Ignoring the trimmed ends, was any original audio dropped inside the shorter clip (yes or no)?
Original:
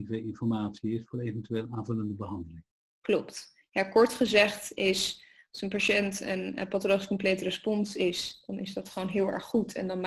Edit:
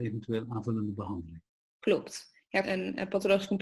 yes